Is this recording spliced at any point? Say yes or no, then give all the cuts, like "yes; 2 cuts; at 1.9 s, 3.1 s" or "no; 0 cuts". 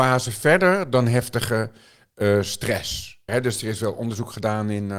yes; 1 cut; at 3.3 s